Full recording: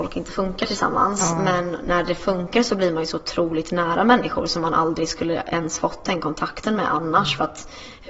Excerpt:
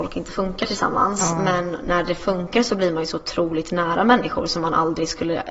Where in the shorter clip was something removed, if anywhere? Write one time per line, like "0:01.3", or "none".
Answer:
none